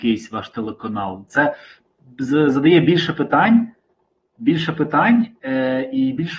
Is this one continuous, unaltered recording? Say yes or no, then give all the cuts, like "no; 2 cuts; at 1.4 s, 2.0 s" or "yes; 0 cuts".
no; 1 cut; at 1.3 s